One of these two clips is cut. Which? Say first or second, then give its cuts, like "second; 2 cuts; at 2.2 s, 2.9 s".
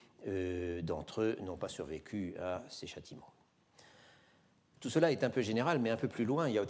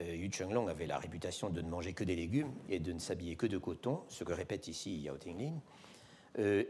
first; 1 cut; at 4.8 s